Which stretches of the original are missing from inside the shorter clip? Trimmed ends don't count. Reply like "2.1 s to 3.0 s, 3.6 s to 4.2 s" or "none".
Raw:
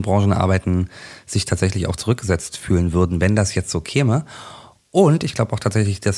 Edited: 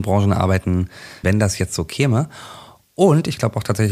1.2 s to 3.2 s